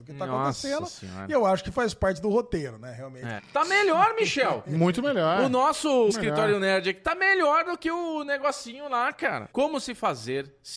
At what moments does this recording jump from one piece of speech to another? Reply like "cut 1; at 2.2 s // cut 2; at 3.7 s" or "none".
cut 1; at 3.4 s // cut 2; at 6.1 s // cut 3; at 9.5 s